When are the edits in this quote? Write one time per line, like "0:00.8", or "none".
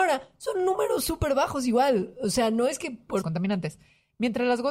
0:03.2